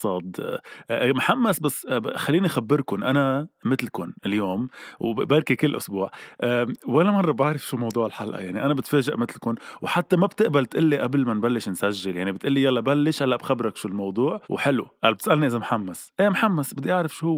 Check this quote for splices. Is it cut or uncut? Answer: cut